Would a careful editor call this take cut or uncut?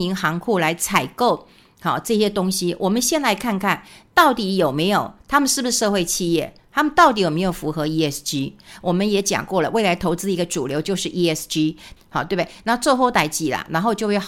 cut